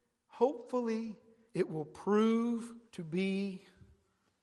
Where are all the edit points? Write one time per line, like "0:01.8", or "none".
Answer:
0:01.5
0:02.9

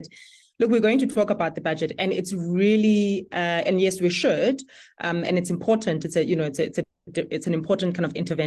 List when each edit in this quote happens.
none

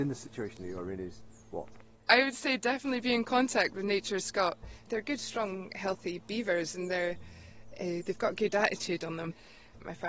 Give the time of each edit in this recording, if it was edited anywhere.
0:04.9

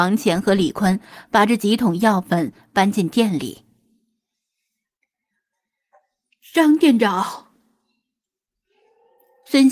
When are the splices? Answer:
none

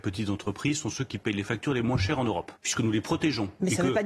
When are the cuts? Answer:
0:02.6

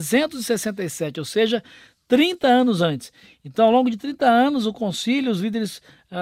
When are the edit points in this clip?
none

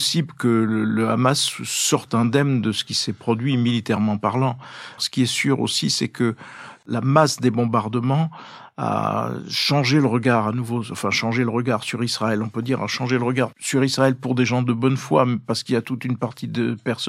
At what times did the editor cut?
0:05.0

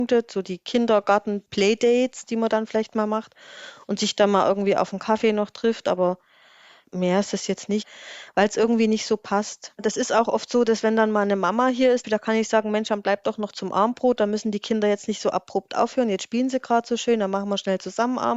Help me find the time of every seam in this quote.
0:12.0

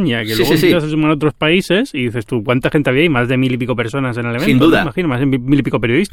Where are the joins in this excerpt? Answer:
none

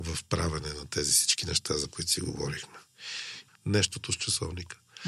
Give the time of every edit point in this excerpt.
0:03.5

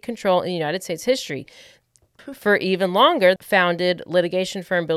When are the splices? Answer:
0:02.2
0:03.4

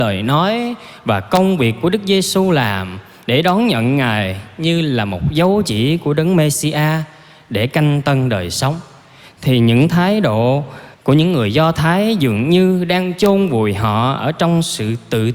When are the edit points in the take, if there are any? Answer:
0:10.9

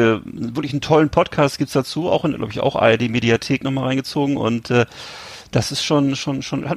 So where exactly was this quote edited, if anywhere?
none

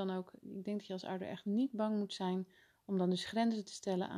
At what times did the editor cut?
none

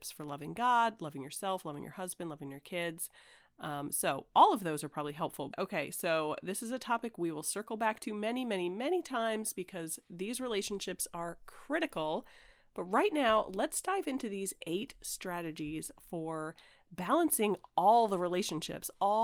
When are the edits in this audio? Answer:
0:05.5

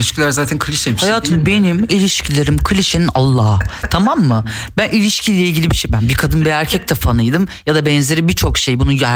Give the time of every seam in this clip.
none

